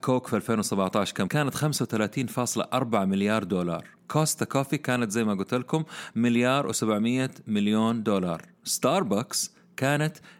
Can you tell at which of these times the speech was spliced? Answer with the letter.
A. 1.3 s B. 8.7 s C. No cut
A